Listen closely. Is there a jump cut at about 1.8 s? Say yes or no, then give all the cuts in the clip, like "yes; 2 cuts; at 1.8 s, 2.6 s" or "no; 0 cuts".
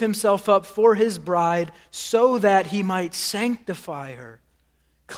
no; 0 cuts